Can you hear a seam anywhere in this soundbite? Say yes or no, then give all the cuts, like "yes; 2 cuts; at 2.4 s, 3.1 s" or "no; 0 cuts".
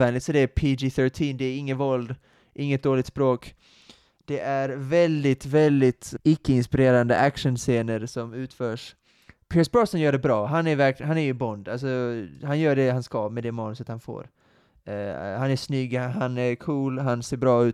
yes; 1 cut; at 6.2 s